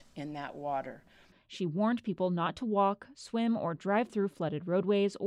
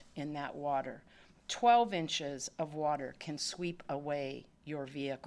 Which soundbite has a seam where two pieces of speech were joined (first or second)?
first